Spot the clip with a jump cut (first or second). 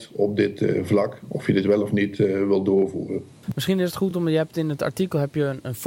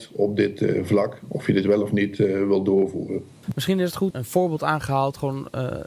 second